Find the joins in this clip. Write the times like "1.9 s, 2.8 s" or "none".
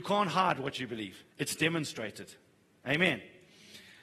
1.3 s